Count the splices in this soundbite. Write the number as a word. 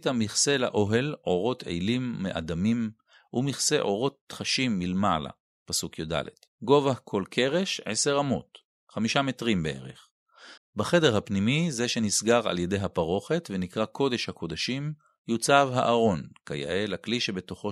two